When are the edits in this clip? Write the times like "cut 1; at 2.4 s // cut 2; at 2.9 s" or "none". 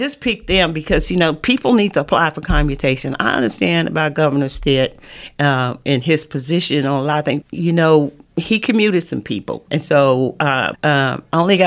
cut 1; at 7.4 s // cut 2; at 9.7 s // cut 3; at 10.7 s